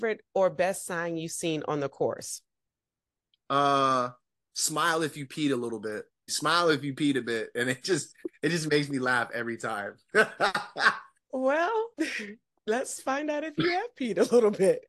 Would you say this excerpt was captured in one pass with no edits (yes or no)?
no